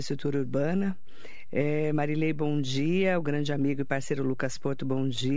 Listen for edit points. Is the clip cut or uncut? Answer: uncut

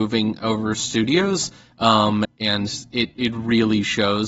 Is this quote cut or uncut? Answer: cut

